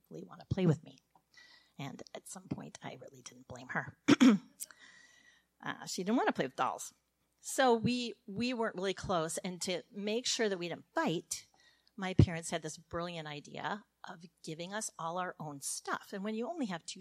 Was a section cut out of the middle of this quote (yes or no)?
no